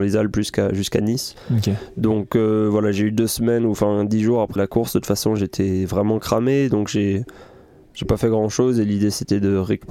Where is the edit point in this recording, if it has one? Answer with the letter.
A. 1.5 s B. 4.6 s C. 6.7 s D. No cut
B